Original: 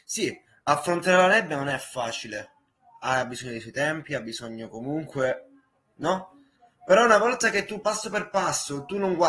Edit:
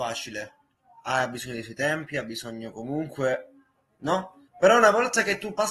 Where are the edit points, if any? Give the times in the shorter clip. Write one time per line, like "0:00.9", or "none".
0:04.5